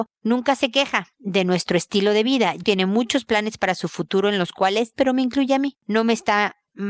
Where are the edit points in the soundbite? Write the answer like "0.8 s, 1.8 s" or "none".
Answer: 2.6 s, 4.9 s